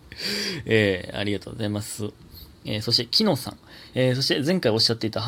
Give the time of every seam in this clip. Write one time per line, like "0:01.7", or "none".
0:03.9